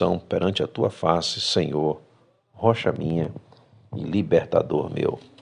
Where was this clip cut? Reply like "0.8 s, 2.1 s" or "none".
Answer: none